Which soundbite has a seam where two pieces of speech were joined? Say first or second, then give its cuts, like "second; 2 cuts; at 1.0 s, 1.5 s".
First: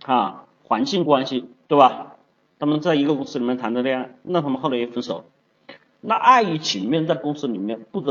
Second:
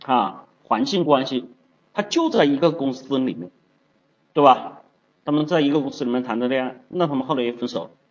first; 1 cut; at 1.7 s